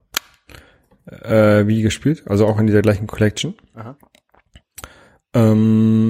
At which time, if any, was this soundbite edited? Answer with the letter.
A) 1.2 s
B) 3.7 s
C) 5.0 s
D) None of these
D